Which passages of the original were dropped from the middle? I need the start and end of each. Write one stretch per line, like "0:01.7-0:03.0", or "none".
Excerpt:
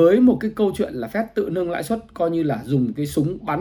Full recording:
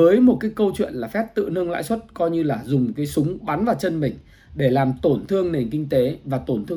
none